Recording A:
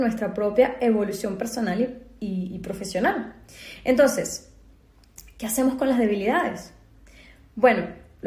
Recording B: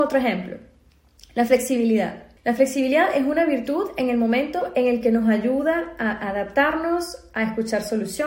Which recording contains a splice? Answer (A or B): B